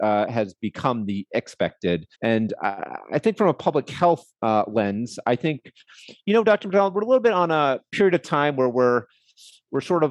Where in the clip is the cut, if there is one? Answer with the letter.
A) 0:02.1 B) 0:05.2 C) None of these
A